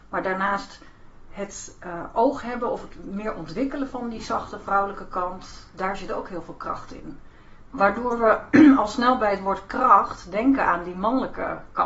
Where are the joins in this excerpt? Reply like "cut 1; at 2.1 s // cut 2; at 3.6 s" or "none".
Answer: cut 1; at 7.7 s